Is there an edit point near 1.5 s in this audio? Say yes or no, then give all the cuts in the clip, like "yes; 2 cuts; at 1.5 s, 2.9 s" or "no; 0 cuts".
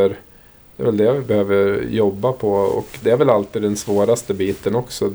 no; 1 cut; at 3.0 s